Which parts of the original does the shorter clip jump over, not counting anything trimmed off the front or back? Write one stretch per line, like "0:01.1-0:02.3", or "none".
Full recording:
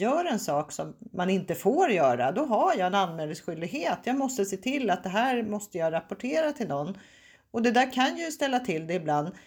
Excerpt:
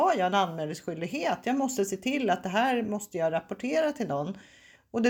none